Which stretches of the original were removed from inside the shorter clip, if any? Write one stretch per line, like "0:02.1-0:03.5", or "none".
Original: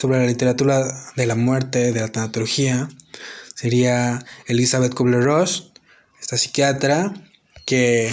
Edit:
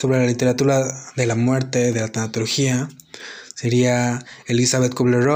none